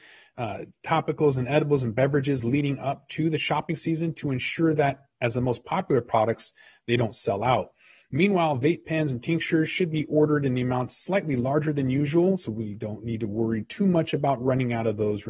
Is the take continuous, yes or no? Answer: yes